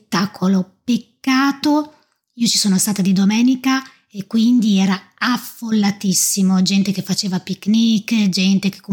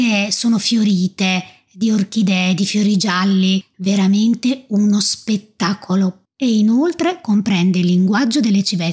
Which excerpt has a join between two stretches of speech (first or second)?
second